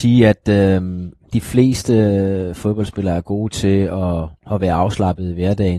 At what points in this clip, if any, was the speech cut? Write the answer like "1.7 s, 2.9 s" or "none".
none